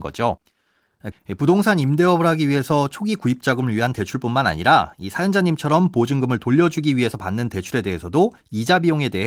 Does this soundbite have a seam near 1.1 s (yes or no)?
yes